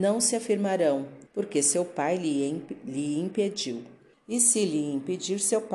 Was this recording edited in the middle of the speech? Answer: yes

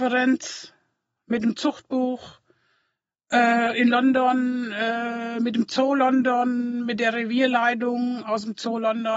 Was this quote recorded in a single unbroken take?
yes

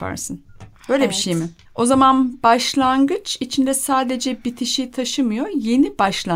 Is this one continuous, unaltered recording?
no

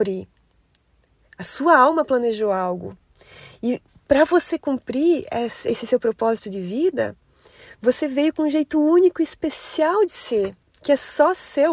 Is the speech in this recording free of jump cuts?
no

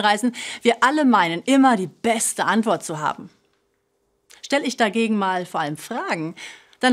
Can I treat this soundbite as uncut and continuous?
yes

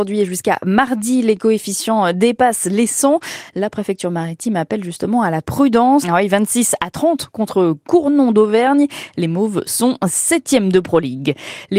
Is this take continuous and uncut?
no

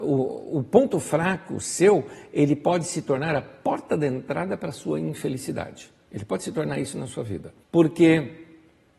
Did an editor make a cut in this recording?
yes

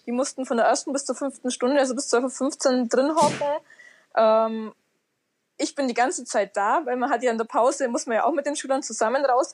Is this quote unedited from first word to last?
yes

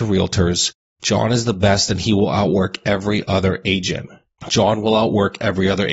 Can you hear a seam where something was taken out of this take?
yes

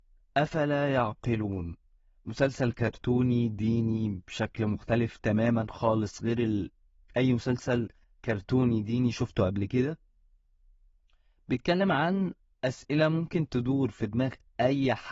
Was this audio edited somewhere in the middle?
no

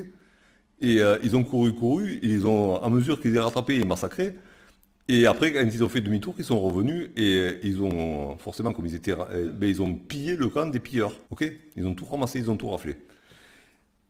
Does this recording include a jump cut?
yes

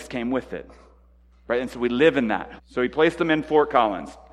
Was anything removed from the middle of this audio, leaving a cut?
yes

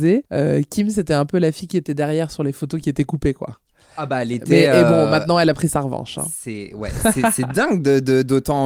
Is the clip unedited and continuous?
yes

